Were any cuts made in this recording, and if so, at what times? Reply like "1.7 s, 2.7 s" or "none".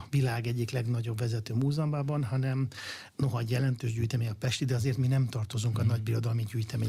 none